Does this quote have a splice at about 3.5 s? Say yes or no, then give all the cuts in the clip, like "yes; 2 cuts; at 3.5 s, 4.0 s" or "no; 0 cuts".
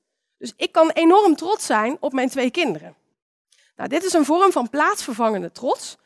no; 0 cuts